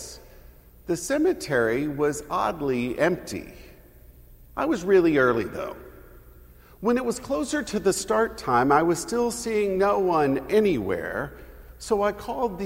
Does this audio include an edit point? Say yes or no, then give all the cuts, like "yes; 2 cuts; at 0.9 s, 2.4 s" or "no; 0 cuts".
no; 0 cuts